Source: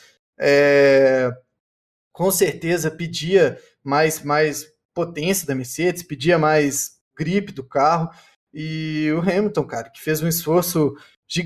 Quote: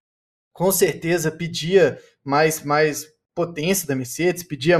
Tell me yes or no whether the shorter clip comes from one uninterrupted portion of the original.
yes